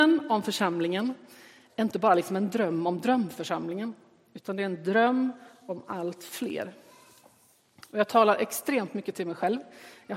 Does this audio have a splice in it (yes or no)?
no